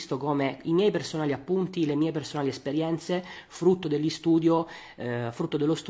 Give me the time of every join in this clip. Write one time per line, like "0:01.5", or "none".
none